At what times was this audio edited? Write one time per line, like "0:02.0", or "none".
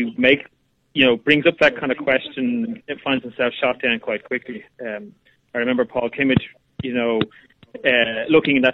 none